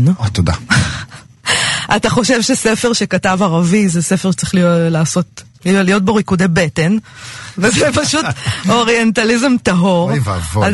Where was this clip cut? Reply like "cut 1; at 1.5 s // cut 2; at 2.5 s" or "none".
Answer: cut 1; at 5.6 s